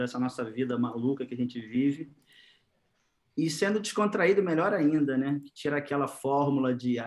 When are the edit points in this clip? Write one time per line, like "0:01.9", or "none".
none

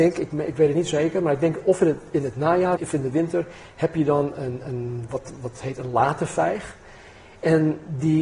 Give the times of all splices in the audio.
0:02.8

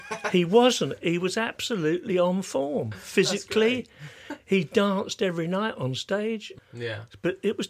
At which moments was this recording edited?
0:06.6

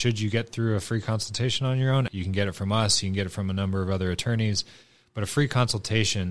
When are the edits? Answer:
0:02.1

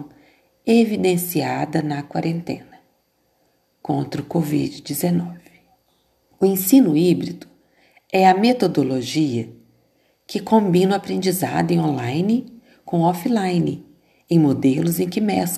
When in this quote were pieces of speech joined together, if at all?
0:06.3

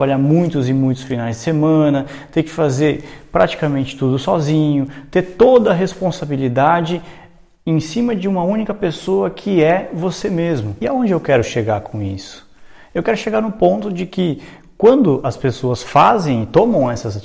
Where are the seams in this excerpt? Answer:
none

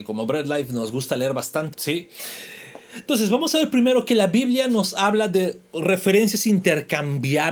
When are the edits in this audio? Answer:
0:01.7

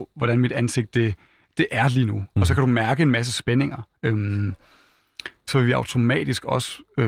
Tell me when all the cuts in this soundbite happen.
0:04.0
0:05.5

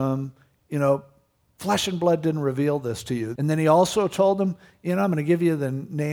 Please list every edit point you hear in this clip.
0:03.4

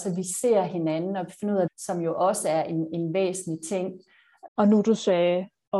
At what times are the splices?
0:01.7
0:04.5

